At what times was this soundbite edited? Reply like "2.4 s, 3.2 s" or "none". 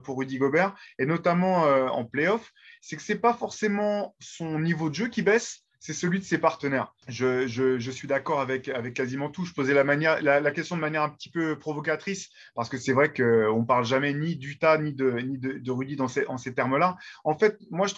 7.0 s